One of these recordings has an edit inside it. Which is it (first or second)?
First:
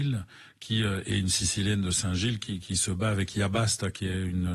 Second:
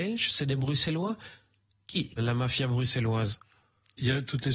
second